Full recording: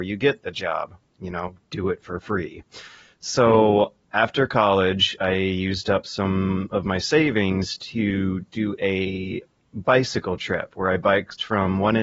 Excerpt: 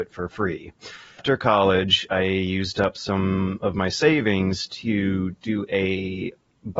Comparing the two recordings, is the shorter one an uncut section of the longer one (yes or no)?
no